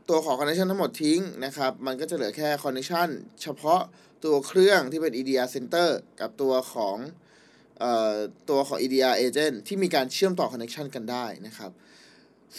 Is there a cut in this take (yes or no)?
no